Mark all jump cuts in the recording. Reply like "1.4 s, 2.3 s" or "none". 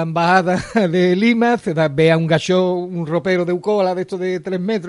none

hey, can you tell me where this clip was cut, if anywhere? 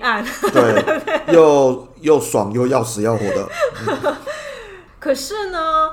4.9 s

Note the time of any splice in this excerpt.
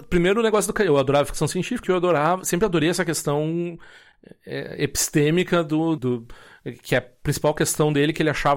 1.8 s, 6.0 s

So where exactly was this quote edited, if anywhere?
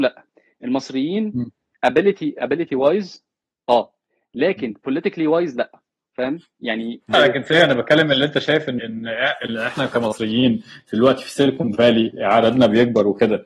7.1 s, 8.8 s

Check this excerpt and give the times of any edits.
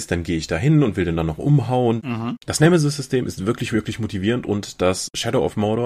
2.0 s

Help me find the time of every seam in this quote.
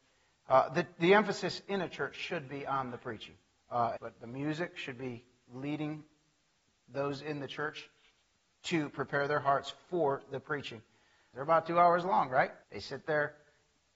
4.0 s, 11.3 s, 12.6 s

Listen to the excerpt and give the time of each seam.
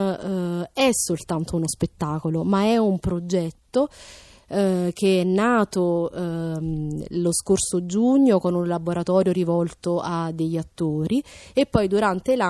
none

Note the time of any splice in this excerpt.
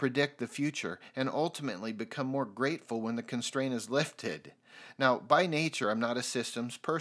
none

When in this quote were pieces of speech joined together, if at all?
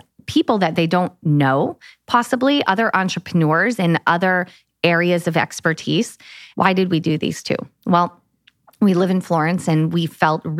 6.5 s

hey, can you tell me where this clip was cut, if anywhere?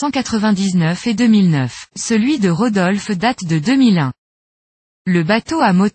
1.9 s

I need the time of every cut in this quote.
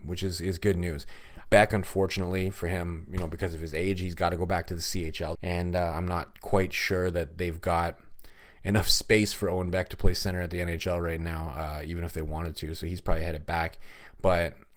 1.5 s, 5.3 s

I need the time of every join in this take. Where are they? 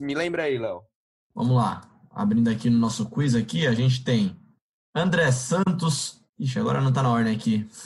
6.3 s

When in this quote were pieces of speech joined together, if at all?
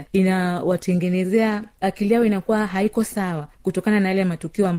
1.8 s

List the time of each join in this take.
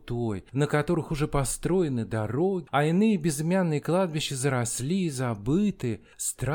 2.7 s

